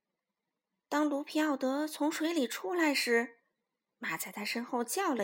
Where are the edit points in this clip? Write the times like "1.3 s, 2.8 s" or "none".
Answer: none